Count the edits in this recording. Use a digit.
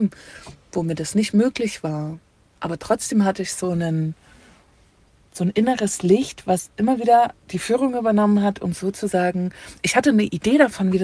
0